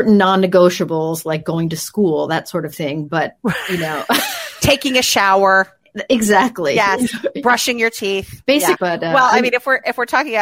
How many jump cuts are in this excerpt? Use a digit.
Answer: 1